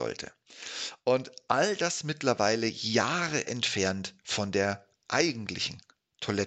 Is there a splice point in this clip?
no; 0 cuts

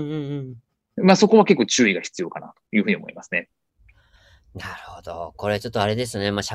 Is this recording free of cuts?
yes; 0 cuts

